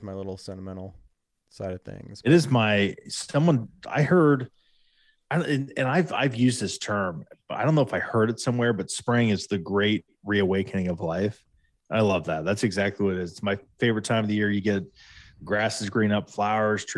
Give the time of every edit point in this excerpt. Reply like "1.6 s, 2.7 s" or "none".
none